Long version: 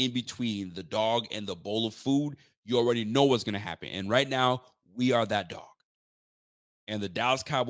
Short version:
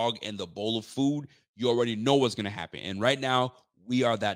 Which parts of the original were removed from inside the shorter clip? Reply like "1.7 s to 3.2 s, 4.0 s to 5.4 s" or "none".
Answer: none